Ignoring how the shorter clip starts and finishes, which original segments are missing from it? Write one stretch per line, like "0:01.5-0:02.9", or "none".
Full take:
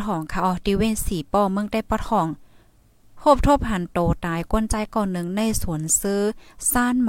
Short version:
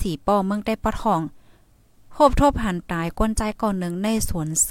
0:03.9-0:04.2